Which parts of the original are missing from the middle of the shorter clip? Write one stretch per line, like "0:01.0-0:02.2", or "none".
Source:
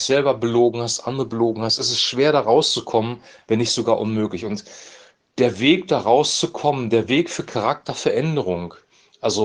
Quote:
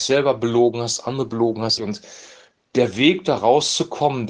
0:01.8-0:04.4